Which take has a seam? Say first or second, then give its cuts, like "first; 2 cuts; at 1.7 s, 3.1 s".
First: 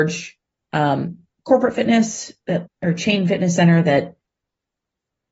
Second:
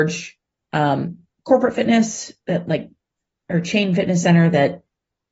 first; 1 cut; at 2.6 s